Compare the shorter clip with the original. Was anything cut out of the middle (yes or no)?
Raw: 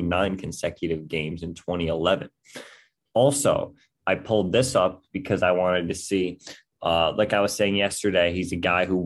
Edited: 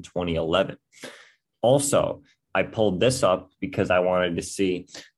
no